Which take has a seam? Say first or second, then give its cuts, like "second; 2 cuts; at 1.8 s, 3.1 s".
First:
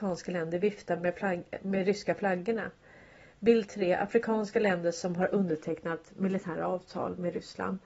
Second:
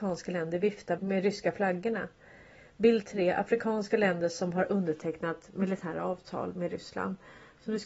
second; 1 cut; at 1.0 s